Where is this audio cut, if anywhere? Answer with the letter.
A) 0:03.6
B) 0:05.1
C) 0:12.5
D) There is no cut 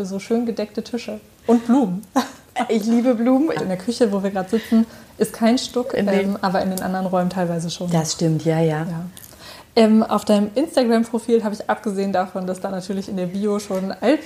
A